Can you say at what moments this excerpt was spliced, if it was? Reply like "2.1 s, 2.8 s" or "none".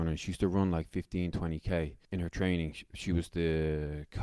2.0 s